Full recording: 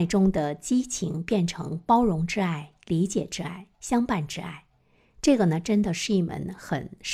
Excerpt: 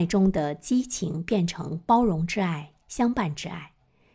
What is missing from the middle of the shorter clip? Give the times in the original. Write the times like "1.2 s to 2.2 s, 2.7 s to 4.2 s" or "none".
2.8 s to 3.7 s